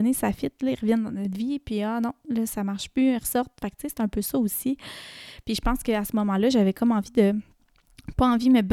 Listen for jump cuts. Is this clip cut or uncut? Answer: uncut